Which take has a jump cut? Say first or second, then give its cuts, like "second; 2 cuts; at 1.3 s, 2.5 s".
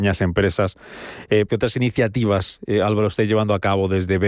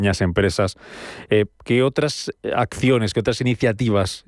first; 1 cut; at 1.5 s